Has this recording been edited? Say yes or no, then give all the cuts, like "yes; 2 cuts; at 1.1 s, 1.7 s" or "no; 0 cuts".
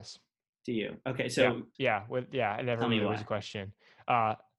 yes; 1 cut; at 1.7 s